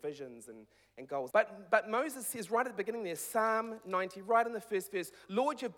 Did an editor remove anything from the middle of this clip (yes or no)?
yes